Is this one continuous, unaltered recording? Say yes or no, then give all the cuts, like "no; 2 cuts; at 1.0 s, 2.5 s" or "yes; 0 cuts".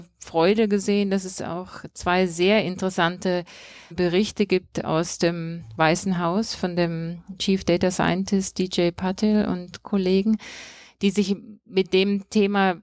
no; 1 cut; at 3.9 s